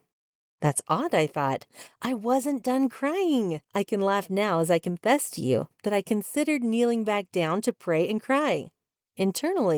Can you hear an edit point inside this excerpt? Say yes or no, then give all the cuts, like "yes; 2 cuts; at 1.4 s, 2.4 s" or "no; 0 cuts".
yes; 1 cut; at 3.6 s